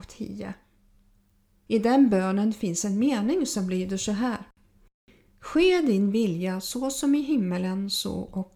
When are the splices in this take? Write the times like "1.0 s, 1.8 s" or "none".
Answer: none

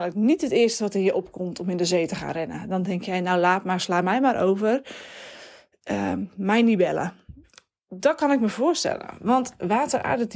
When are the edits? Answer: none

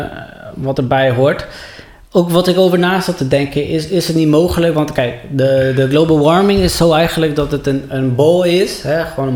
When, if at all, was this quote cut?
none

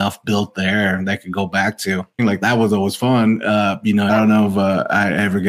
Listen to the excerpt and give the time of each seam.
2.2 s, 4.1 s

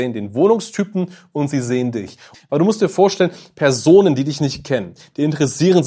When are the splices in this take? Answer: 2.3 s

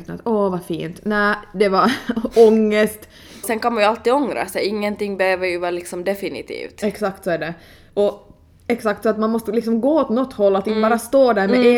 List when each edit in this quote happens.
3.4 s

